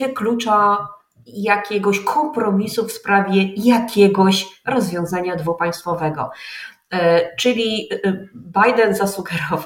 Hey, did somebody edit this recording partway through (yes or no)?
no